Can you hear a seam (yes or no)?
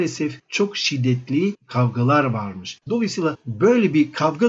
yes